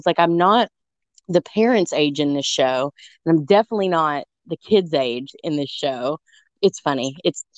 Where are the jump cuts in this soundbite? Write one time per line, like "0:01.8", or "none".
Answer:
0:06.5